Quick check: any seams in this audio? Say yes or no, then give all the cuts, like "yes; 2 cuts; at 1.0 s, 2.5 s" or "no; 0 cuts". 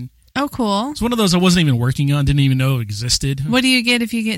no; 0 cuts